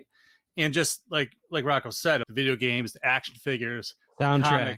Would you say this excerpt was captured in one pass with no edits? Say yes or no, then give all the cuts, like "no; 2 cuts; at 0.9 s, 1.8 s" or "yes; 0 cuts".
no; 1 cut; at 2.2 s